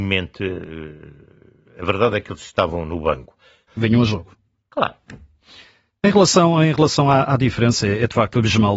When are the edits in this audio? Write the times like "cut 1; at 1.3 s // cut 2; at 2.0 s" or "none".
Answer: cut 1; at 3.7 s